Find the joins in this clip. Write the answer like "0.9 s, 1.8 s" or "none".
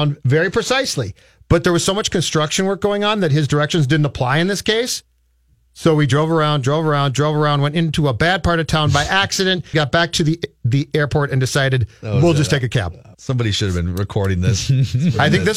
9.7 s, 13.1 s